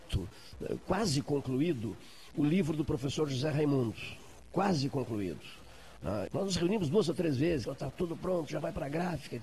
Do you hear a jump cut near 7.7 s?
yes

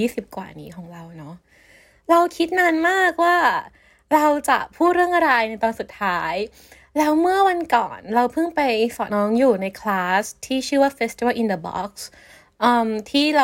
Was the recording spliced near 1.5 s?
no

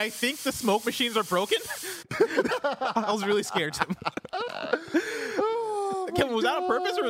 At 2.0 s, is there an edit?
yes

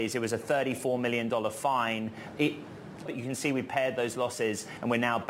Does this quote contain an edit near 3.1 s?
yes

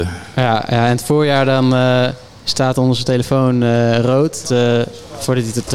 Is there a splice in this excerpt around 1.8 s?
no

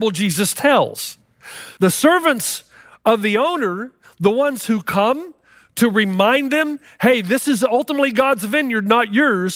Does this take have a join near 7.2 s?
no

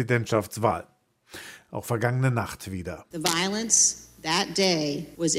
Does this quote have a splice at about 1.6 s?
yes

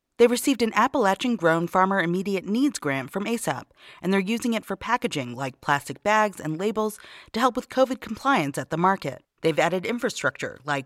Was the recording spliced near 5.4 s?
no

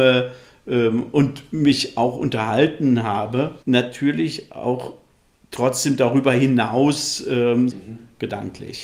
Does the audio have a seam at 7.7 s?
yes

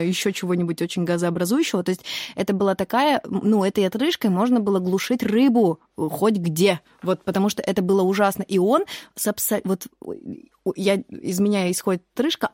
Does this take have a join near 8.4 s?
no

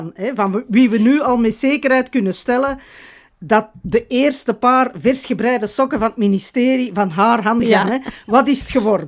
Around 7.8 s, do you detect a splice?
yes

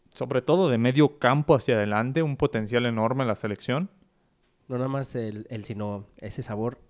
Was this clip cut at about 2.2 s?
no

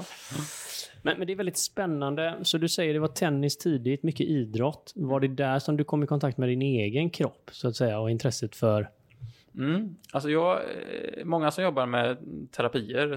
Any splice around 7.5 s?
no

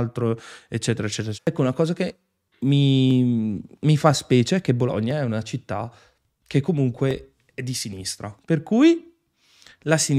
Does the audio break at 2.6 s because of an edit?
no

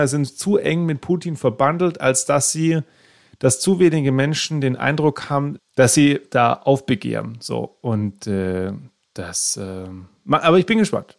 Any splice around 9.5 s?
no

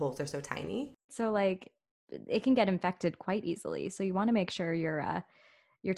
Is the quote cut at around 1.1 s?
yes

